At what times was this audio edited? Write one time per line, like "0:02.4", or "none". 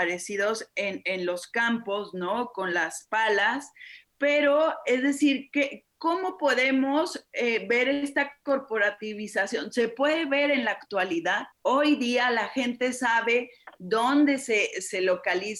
none